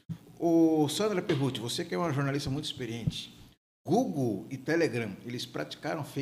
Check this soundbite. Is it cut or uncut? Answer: uncut